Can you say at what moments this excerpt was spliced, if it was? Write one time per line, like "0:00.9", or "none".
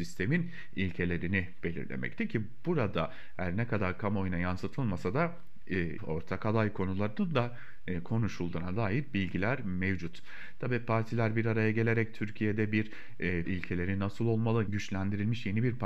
0:06.0
0:13.4
0:14.7

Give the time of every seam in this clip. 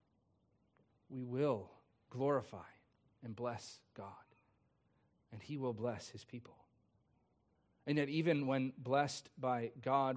none

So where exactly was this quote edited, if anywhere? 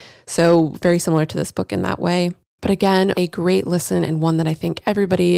0:03.1

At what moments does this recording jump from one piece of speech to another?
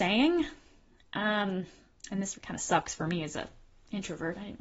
0:02.3

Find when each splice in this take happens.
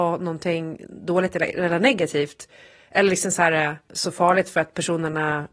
0:03.9

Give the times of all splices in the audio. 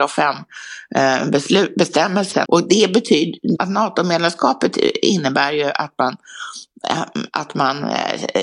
0:02.5
0:03.6

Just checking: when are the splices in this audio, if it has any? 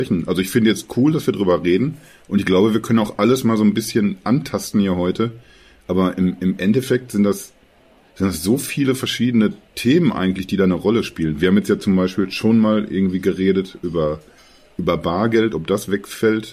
none

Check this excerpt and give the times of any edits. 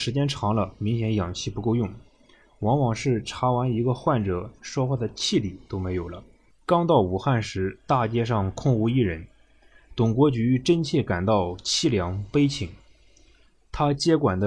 0:04.6
0:06.5

